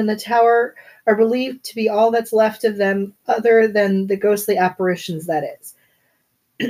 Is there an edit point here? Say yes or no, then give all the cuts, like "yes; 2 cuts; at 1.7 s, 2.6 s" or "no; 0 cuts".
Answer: no; 0 cuts